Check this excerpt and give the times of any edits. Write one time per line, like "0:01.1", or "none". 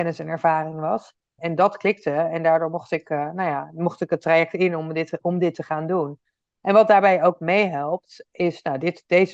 0:01.4